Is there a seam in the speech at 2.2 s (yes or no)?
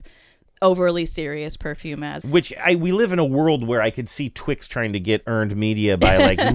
yes